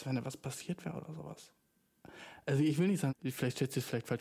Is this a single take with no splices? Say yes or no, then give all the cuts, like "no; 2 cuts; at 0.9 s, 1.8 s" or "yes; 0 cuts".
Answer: no; 1 cut; at 3.1 s